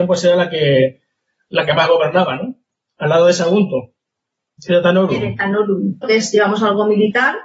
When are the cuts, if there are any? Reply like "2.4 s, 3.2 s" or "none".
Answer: 4.6 s, 6.0 s